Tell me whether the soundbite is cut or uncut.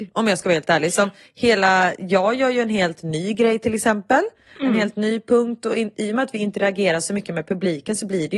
uncut